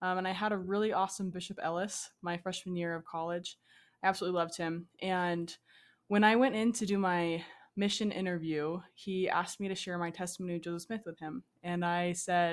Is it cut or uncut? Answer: cut